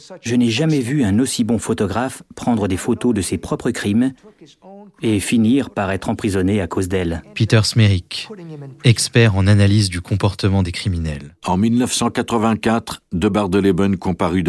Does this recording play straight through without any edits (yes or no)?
yes